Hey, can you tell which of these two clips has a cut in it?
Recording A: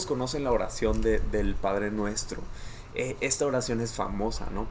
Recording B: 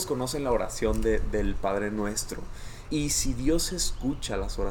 B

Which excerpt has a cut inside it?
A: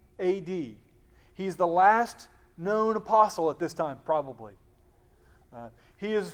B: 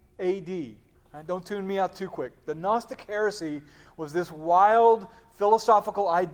B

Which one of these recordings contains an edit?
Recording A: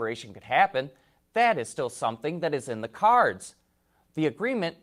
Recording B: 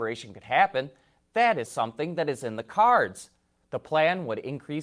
B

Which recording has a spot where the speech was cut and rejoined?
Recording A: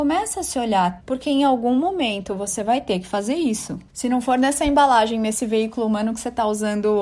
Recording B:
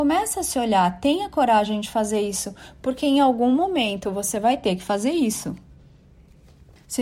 A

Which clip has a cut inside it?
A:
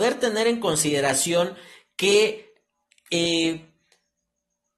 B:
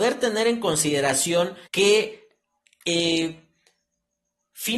B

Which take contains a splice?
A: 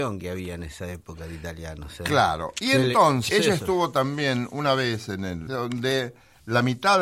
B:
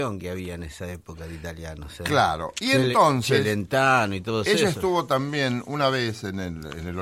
A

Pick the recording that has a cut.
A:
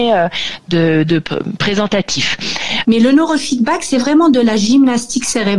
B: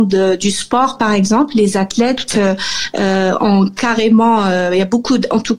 A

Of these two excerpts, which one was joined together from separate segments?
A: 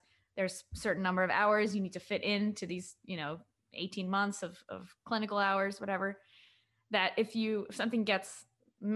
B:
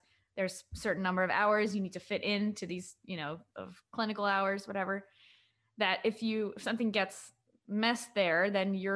B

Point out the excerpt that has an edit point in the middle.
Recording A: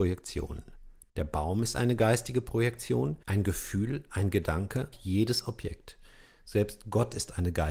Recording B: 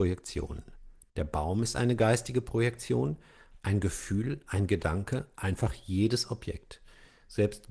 A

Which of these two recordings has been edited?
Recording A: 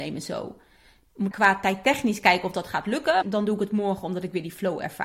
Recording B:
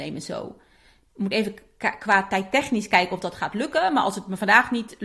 A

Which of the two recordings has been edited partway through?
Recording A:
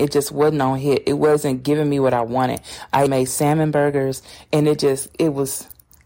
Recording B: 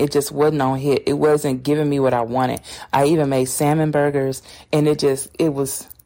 A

